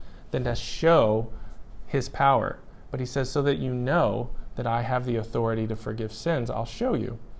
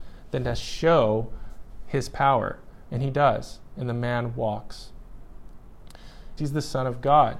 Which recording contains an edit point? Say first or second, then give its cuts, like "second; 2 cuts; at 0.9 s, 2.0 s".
second; 2 cuts; at 2.8 s, 6.4 s